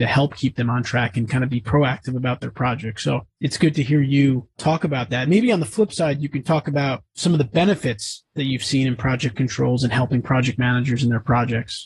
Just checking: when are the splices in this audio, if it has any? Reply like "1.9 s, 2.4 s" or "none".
none